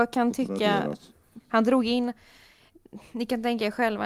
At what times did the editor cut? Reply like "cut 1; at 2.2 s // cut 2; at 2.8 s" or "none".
cut 1; at 1.4 s